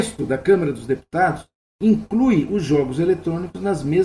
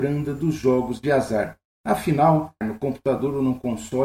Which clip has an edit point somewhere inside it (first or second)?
second